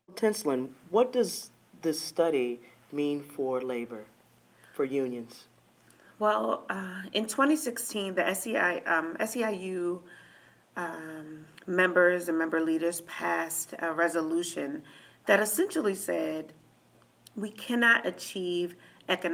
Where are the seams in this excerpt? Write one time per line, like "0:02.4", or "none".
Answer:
none